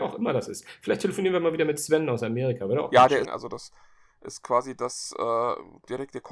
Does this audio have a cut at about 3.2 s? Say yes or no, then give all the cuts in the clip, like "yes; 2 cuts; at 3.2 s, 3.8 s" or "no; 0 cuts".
yes; 1 cut; at 3.2 s